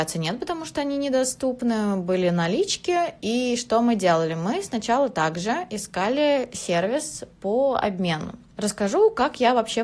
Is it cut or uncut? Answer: uncut